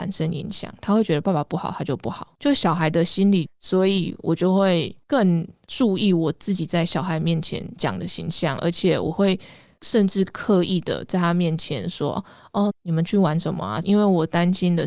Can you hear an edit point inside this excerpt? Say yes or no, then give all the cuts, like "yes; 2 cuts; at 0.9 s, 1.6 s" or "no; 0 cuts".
yes; 3 cuts; at 3.5 s, 12.7 s, 13.8 s